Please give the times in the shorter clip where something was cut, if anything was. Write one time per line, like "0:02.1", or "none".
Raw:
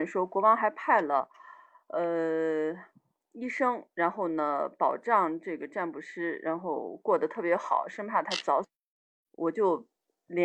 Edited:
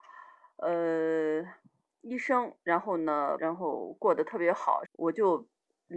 0:03.4
0:04.8